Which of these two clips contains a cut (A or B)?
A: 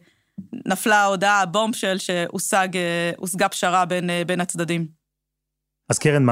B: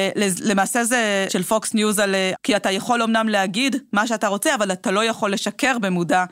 B